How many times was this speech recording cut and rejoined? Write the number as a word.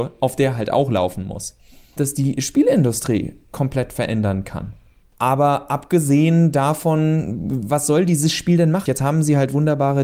three